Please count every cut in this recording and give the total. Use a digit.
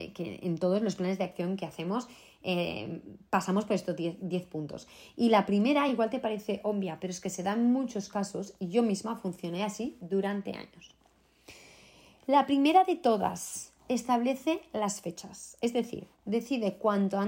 0